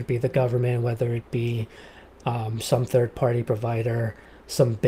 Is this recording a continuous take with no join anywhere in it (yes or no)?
yes